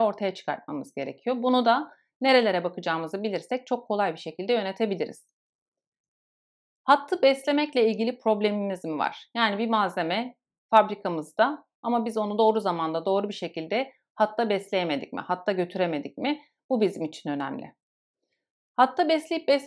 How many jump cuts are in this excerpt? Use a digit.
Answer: 0